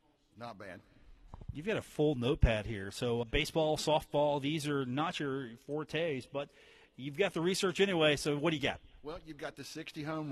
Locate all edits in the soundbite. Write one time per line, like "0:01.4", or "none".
0:03.2